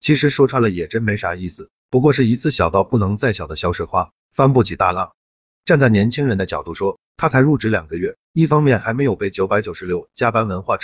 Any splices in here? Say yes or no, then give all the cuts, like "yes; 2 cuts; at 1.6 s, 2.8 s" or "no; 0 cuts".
no; 0 cuts